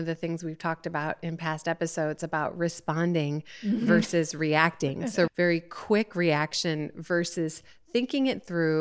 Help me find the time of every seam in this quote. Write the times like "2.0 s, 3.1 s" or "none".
5.3 s